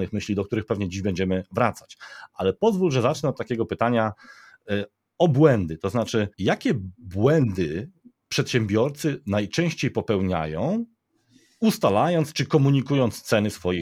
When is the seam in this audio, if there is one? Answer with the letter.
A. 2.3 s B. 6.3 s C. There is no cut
B